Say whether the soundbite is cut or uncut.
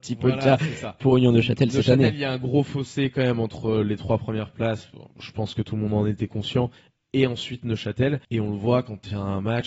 cut